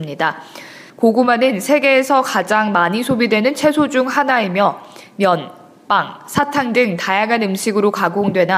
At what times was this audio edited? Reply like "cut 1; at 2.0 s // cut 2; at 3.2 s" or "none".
cut 1; at 0.9 s